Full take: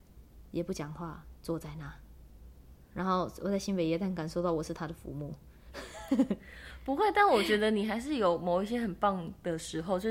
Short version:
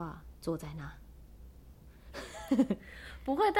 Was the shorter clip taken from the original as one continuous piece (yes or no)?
no